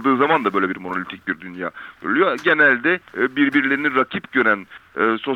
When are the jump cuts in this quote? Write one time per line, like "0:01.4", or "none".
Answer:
0:03.1